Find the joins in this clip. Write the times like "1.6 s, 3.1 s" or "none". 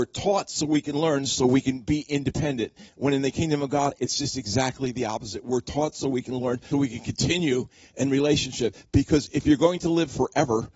6.7 s